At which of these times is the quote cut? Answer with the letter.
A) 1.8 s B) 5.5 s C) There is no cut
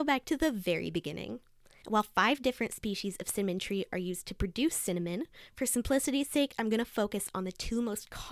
A